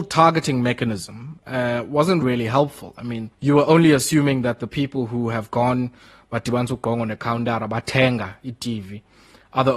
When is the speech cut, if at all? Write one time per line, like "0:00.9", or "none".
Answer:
0:02.2
0:03.3